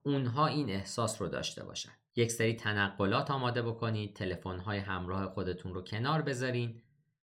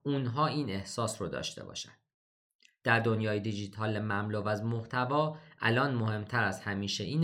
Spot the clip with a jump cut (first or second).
first